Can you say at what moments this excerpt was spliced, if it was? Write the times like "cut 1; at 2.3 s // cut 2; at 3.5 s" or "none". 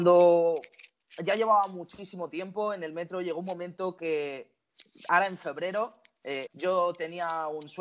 cut 1; at 6.5 s